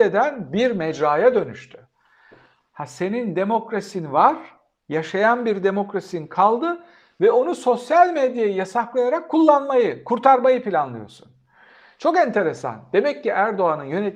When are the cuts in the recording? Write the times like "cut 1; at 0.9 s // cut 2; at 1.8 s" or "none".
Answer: none